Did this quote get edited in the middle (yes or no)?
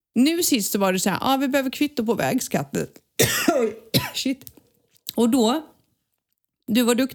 no